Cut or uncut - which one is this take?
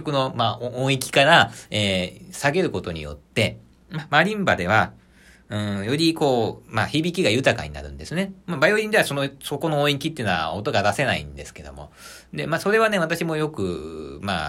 uncut